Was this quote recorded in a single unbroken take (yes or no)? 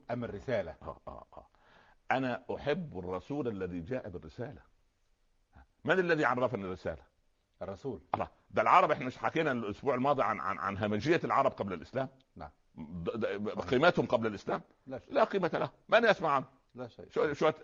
no